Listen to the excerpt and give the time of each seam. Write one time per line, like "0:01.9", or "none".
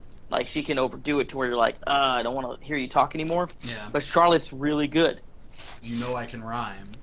0:05.8